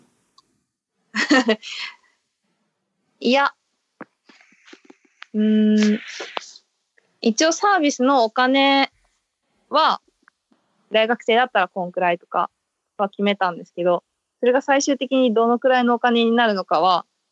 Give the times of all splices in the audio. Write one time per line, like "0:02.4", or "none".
none